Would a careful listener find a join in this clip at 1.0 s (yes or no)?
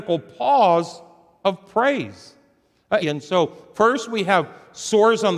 no